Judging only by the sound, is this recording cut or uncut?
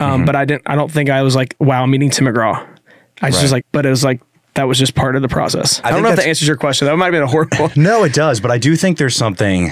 cut